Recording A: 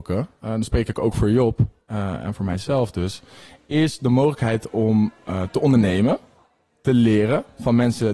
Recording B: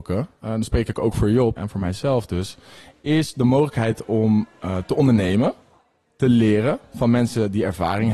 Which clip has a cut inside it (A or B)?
B